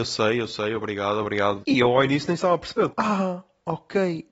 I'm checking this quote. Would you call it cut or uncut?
cut